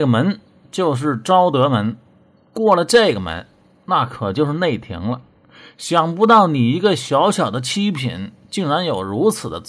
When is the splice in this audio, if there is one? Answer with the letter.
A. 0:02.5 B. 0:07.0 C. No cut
C